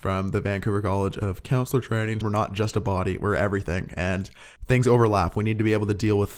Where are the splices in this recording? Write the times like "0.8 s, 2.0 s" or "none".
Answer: 2.2 s, 4.6 s